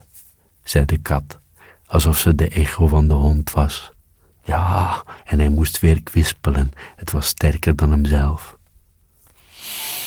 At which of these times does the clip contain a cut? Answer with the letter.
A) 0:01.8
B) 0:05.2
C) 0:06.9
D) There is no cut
B